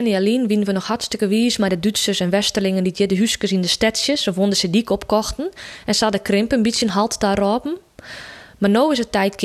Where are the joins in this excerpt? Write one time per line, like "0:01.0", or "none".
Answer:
none